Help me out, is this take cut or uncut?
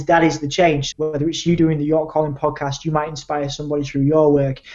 cut